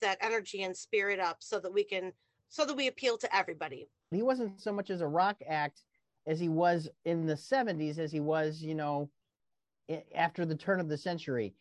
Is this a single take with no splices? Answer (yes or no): no